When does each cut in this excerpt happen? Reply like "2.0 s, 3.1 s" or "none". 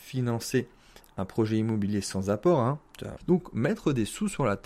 3.2 s